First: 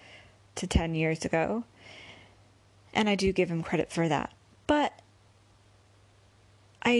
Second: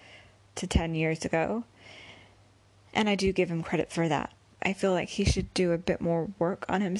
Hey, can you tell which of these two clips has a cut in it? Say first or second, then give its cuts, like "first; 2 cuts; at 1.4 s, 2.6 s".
second; 1 cut; at 4.6 s